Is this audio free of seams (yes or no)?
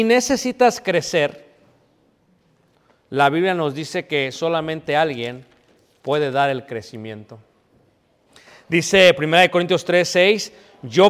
yes